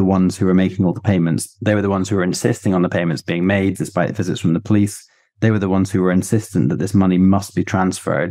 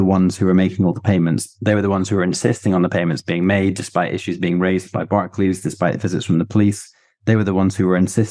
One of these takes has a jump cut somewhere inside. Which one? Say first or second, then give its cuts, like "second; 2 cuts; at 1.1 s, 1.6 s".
first; 1 cut; at 3.7 s